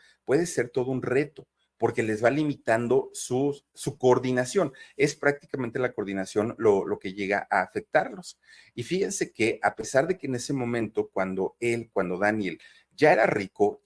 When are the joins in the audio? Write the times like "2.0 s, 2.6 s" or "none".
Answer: none